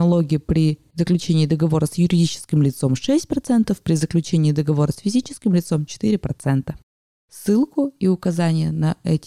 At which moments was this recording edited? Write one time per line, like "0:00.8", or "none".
0:07.2